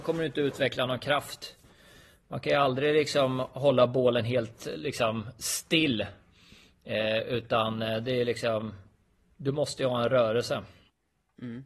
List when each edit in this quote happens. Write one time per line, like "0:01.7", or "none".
none